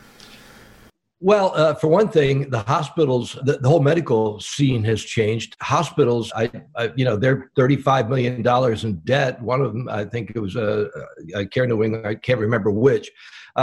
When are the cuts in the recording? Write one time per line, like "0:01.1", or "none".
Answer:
0:03.4
0:06.3